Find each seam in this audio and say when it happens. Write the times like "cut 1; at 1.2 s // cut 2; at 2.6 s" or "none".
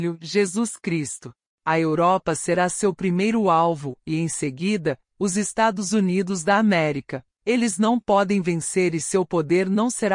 cut 1; at 7.4 s